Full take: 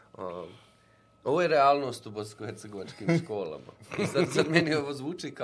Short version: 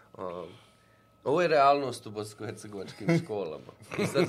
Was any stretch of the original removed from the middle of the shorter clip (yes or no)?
no